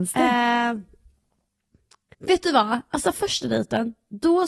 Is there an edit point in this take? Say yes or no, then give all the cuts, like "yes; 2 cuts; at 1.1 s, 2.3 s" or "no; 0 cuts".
no; 0 cuts